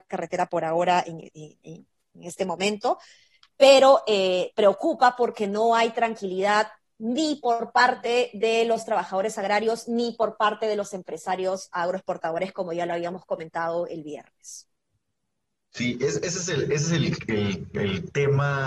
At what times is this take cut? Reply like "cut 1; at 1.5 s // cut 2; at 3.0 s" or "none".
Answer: none